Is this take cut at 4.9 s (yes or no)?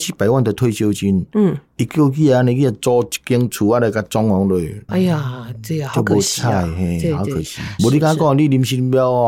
yes